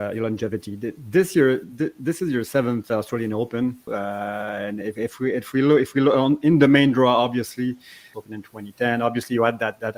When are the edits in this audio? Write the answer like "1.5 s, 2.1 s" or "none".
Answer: 3.9 s, 8.1 s